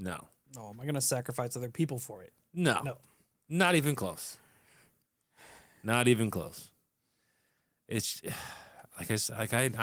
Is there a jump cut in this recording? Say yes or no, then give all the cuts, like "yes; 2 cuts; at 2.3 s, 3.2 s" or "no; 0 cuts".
no; 0 cuts